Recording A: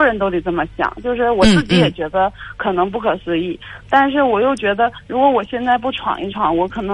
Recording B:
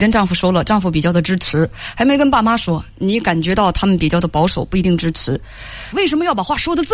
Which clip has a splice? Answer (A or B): B